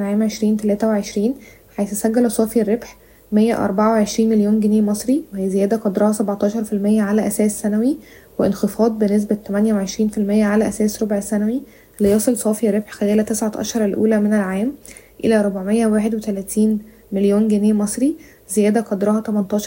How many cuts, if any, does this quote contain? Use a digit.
0